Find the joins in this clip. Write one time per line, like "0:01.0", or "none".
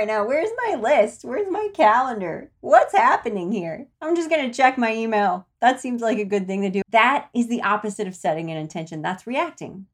0:03.9
0:06.8